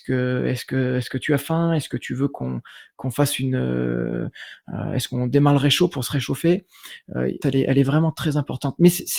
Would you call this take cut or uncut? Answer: cut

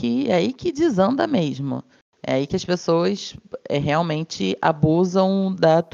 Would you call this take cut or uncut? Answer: uncut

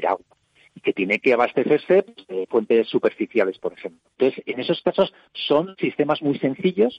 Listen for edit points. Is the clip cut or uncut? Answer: cut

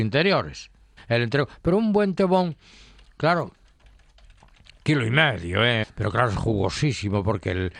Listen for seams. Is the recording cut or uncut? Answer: cut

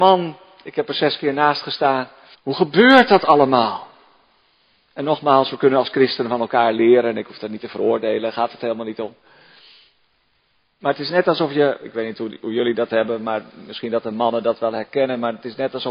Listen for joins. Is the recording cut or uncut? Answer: cut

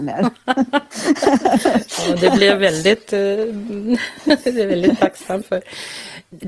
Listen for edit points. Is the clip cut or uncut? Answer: uncut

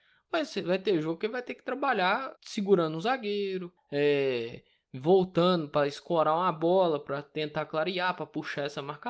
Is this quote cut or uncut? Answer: cut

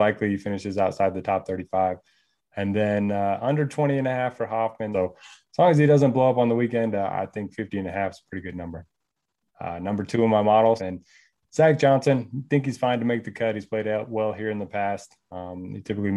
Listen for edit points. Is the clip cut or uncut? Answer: cut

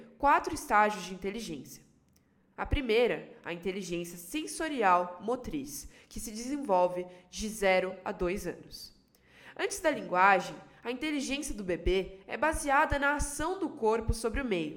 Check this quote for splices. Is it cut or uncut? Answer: uncut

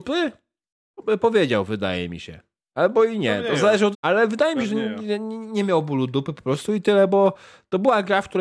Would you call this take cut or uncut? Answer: cut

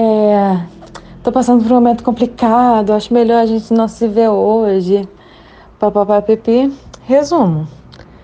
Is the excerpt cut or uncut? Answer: uncut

